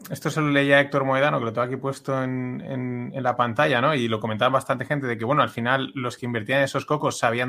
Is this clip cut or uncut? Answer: uncut